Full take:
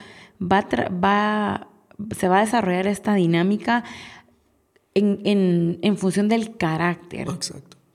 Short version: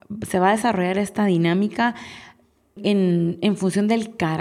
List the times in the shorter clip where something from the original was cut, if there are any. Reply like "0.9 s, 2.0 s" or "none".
2.8 s